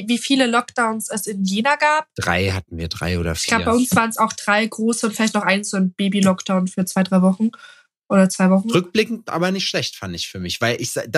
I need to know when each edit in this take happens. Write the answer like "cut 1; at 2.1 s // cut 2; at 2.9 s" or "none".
none